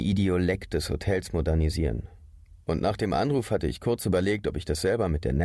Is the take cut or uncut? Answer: uncut